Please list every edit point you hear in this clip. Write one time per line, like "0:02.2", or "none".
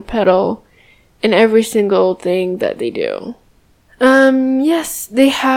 0:03.8